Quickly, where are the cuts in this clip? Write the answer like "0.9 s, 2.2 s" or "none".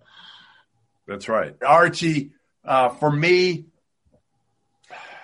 1.6 s